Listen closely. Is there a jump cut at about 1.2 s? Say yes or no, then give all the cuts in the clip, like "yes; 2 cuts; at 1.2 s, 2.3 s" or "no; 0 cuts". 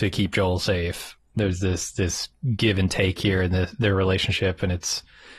yes; 1 cut; at 1.2 s